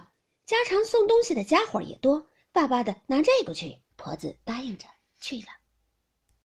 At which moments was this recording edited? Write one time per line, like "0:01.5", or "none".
0:03.9